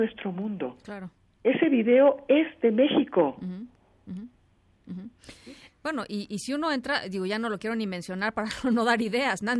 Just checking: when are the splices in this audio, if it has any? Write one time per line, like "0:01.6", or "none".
0:05.6